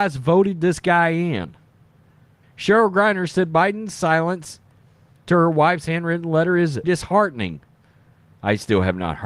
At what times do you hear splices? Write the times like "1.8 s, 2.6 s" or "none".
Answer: 2.4 s, 6.8 s